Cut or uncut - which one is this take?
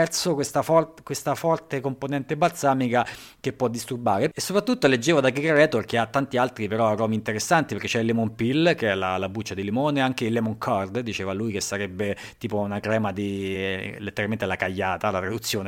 uncut